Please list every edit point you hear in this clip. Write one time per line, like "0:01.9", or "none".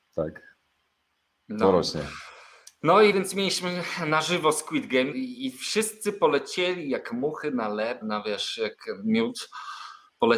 0:03.1
0:05.1
0:08.0